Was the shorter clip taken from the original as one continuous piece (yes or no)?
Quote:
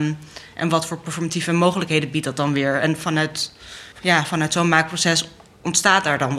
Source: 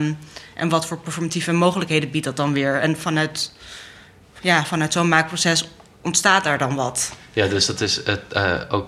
no